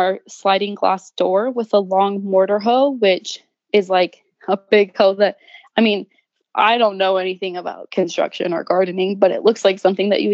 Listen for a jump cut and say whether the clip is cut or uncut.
uncut